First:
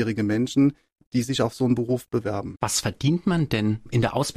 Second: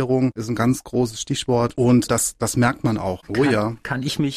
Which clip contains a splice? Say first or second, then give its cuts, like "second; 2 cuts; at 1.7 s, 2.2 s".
second; 1 cut; at 3.2 s